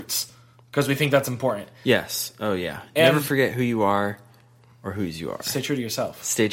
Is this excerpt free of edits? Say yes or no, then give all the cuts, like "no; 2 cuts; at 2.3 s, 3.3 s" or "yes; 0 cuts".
yes; 0 cuts